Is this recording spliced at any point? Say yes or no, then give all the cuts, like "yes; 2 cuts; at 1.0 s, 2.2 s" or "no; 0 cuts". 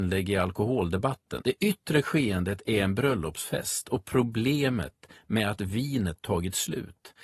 yes; 1 cut; at 1.4 s